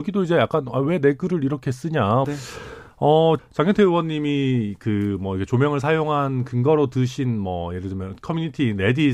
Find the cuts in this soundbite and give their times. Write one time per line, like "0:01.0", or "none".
0:02.2
0:03.4